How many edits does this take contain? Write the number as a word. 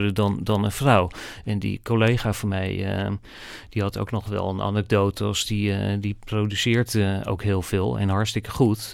zero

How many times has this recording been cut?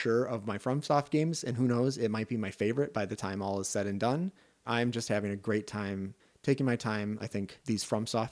two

